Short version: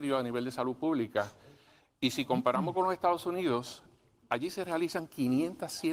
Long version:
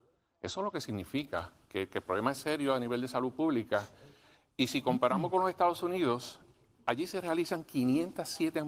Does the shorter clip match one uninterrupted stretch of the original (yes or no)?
yes